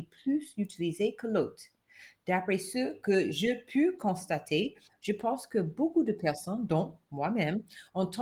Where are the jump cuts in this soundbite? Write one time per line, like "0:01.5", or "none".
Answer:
none